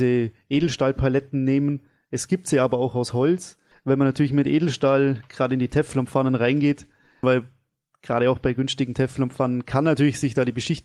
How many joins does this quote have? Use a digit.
2